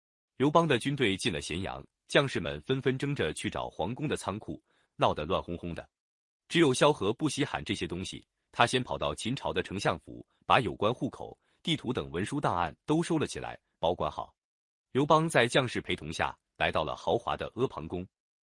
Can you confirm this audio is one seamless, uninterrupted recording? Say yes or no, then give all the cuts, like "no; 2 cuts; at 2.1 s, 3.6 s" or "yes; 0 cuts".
no; 1 cut; at 4.9 s